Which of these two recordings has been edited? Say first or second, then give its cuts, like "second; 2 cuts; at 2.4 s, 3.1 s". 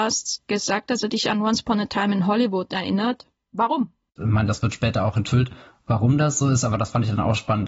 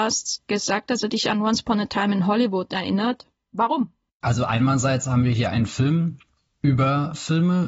first; 2 cuts; at 4.2 s, 6.4 s